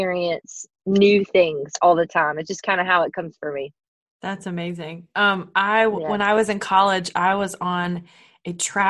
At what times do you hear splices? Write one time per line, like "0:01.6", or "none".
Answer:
none